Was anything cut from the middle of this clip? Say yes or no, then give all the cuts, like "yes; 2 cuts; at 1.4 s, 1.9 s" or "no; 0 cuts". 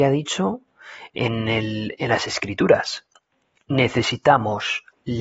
no; 0 cuts